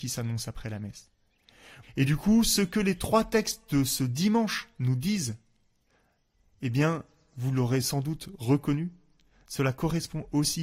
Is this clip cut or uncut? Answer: cut